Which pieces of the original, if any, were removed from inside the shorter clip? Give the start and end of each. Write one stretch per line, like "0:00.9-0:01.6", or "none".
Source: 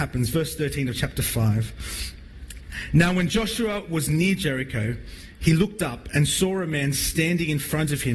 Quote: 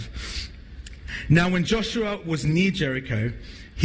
none